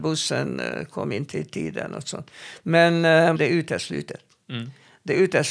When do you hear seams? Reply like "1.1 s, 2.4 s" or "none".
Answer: 3.3 s